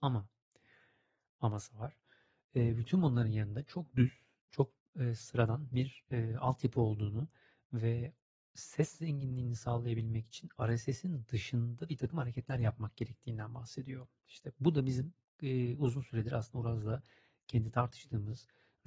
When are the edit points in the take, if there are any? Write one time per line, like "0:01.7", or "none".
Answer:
none